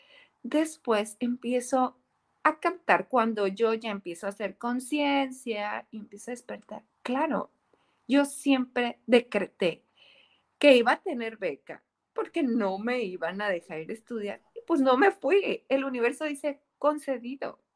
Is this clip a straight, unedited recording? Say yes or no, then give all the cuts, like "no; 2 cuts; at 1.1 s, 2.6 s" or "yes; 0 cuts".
yes; 0 cuts